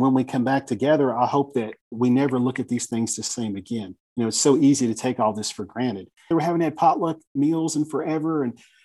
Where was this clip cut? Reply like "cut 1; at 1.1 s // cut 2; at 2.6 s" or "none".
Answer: cut 1; at 4.0 s // cut 2; at 6.3 s